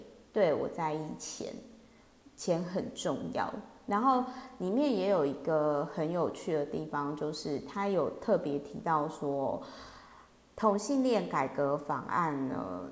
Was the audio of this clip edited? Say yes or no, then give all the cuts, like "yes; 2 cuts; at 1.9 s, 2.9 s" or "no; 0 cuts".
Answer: no; 0 cuts